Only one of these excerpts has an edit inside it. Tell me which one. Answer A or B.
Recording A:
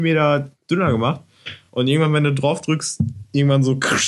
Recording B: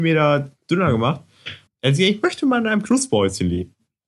B